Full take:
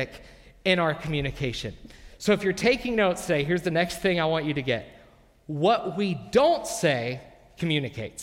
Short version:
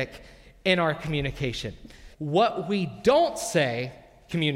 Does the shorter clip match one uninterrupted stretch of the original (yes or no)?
no